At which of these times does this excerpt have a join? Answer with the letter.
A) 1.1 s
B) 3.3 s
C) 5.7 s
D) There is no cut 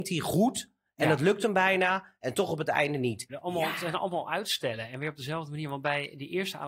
B